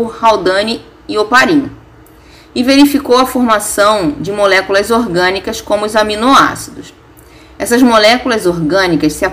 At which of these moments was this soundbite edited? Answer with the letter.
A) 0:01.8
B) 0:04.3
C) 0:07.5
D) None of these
D